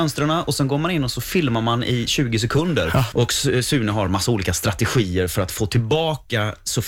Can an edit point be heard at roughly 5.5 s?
no; 1 cut; at 3.1 s

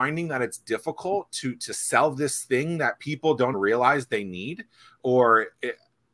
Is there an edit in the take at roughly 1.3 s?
no; 1 cut; at 3.5 s

